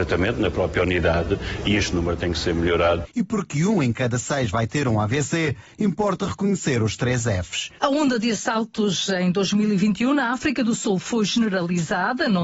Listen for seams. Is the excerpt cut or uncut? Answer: cut